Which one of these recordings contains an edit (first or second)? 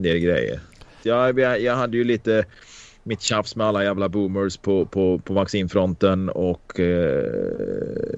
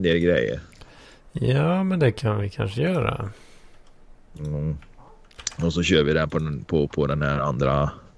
first